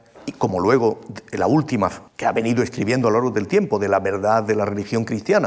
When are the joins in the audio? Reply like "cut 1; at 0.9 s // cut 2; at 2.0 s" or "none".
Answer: cut 1; at 2.1 s